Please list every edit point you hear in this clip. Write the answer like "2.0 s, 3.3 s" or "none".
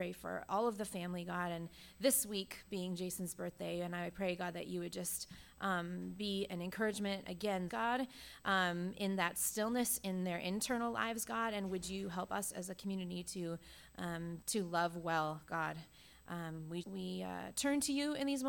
7.7 s, 14.4 s, 16.8 s